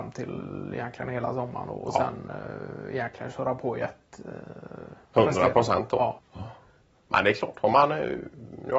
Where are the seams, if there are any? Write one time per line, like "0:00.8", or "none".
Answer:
0:06.2